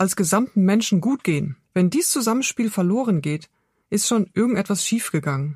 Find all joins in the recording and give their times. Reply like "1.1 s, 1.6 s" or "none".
1.6 s

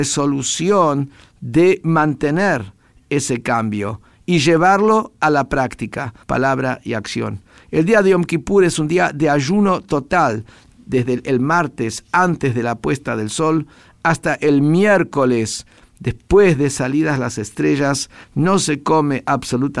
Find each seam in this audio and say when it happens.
6.2 s, 18.2 s

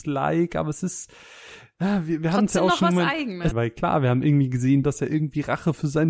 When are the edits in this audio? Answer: 3.5 s, 4.8 s

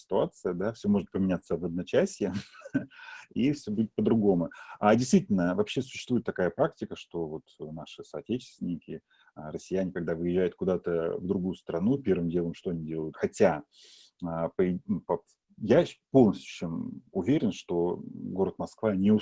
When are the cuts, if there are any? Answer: 13.1 s

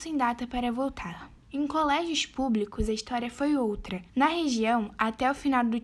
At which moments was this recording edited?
1.4 s, 4.1 s

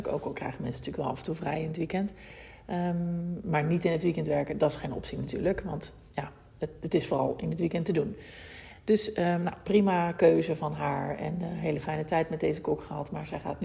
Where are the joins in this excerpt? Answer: none

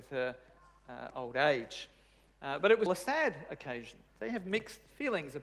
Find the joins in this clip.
2.9 s, 4.1 s

